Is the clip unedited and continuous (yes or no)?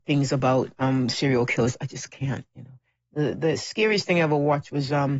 yes